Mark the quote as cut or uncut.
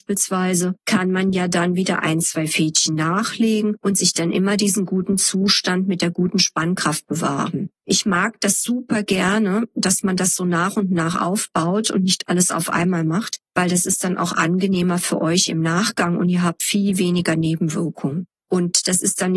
uncut